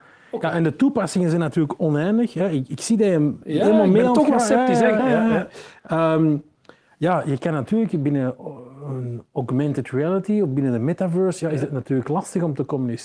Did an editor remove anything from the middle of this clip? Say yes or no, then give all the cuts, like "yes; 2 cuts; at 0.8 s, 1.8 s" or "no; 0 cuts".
yes; 1 cut; at 5.0 s